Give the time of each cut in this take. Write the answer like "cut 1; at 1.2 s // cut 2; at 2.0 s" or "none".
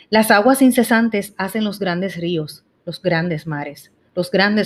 none